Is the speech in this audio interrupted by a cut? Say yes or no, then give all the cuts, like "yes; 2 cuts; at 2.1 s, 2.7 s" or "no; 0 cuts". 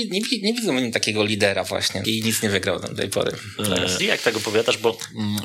yes; 2 cuts; at 2.0 s, 4.0 s